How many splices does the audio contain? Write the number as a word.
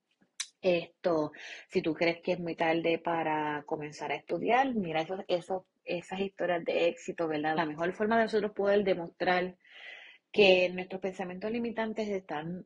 two